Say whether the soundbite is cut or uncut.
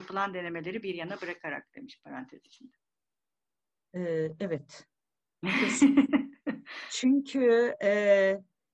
uncut